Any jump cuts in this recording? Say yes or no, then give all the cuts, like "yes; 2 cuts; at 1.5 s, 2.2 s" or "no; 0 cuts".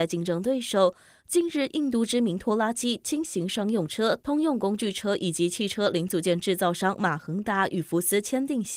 yes; 1 cut; at 1.2 s